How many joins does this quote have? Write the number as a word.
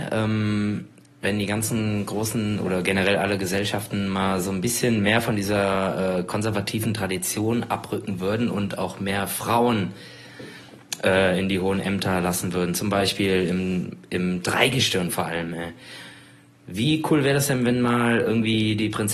zero